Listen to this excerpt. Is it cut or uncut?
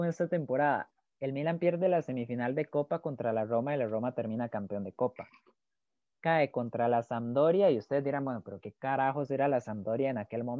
cut